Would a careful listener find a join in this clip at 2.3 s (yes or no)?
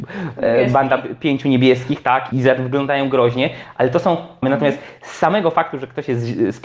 yes